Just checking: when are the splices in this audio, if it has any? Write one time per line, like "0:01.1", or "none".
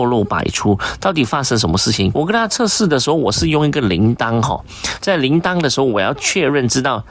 0:02.1
0:05.0